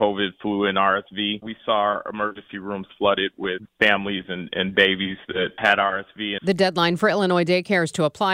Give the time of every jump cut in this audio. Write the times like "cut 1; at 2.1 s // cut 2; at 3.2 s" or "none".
cut 1; at 1.4 s // cut 2; at 6.4 s